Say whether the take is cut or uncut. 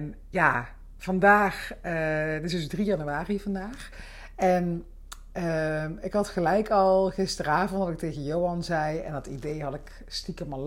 uncut